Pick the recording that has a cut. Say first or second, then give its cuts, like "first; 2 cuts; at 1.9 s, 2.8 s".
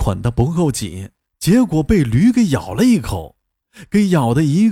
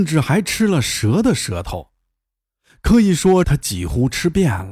second; 1 cut; at 3.4 s